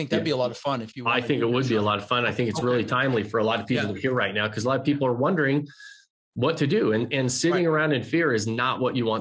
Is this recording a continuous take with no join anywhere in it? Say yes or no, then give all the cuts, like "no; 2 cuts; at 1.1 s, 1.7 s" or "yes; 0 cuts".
yes; 0 cuts